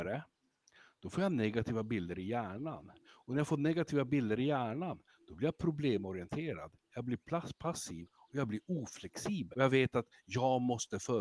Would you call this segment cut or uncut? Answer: cut